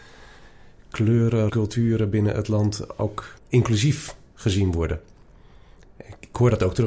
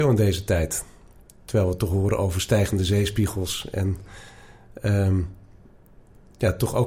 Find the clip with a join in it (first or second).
first